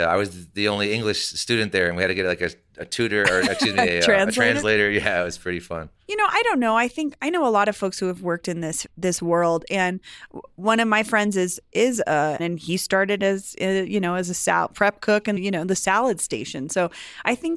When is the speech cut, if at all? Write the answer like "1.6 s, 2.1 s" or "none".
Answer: 12.4 s, 15.4 s